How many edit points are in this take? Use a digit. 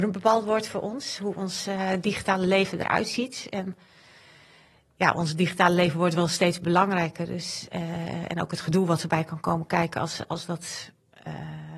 0